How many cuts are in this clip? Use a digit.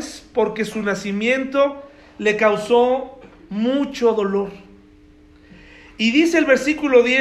0